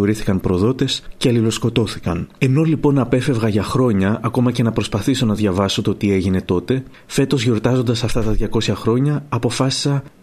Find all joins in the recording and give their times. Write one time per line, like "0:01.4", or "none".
0:02.3